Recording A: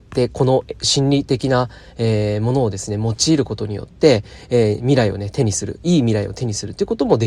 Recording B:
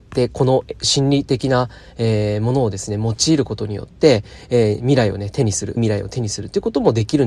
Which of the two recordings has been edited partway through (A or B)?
B